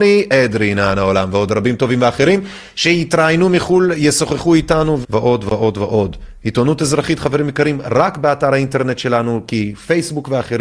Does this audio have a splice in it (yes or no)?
yes